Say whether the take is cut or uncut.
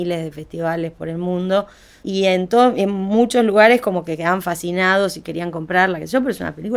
uncut